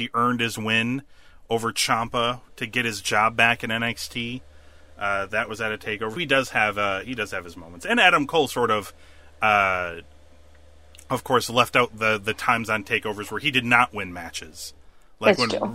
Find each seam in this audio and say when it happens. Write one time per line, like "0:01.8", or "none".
0:06.2